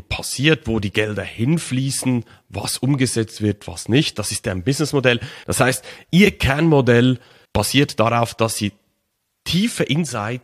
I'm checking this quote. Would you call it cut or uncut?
cut